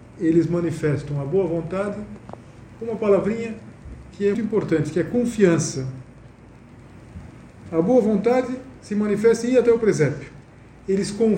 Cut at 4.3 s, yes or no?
yes